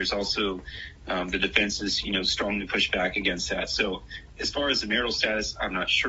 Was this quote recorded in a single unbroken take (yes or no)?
yes